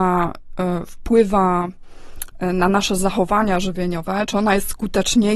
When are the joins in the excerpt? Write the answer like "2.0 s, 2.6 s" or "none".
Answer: none